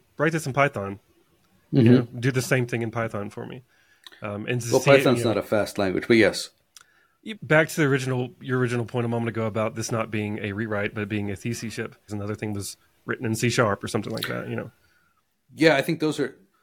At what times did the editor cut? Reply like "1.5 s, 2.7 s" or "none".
7.3 s, 12.1 s

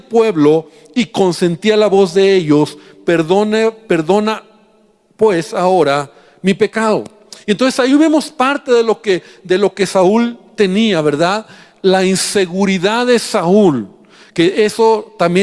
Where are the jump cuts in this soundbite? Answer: none

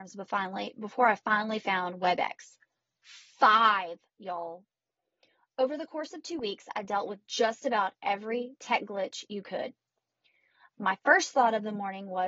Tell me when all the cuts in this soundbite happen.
none

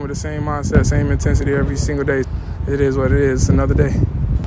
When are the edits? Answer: 2.2 s

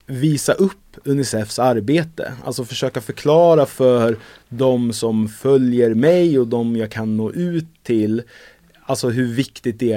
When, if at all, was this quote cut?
none

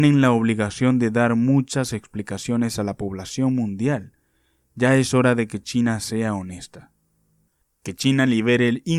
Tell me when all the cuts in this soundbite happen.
7.6 s

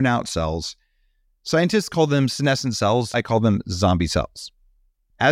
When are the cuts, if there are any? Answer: 3.1 s

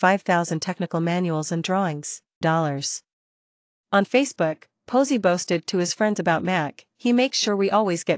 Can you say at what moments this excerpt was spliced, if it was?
2.4 s

